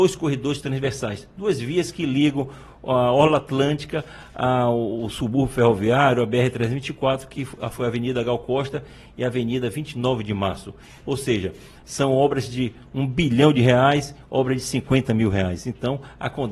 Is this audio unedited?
yes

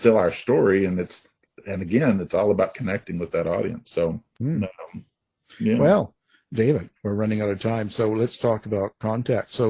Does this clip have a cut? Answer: no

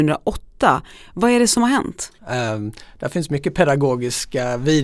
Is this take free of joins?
no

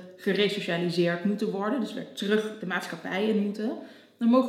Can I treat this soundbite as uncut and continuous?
yes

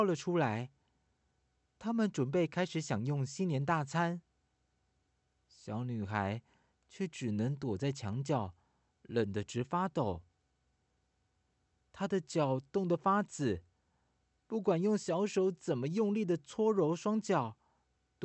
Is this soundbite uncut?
yes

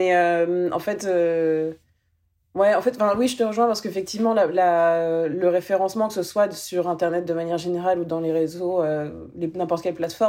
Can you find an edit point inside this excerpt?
no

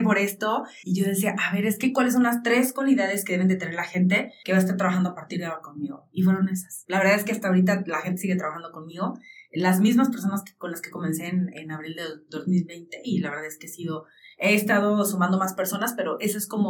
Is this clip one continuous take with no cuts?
yes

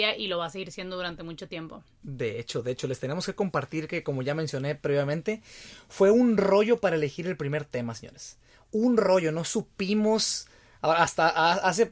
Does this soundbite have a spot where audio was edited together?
no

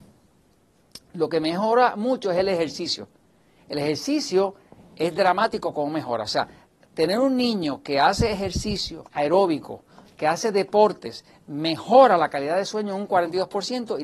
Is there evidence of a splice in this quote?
yes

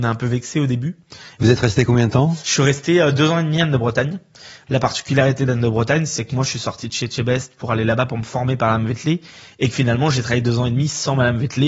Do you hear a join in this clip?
yes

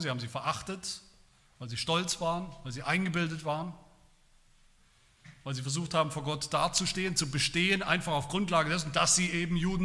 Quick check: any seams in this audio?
no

